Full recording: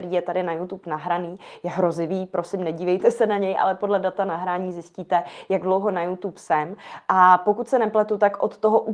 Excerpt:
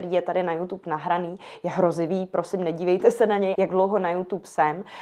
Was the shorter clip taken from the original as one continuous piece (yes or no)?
no